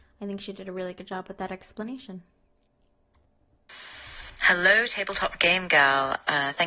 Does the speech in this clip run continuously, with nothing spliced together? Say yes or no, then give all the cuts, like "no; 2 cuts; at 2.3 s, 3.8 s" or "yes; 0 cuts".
yes; 0 cuts